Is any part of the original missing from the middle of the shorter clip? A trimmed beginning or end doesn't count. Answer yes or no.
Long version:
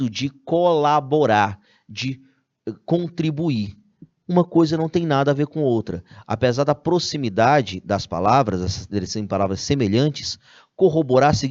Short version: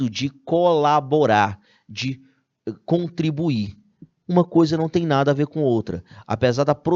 no